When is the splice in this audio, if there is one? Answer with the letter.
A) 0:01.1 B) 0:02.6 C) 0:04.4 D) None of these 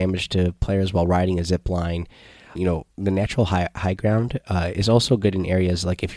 B